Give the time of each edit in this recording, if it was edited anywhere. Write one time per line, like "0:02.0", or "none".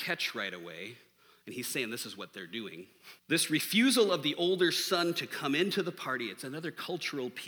0:03.2